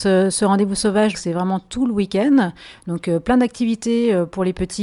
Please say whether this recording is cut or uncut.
cut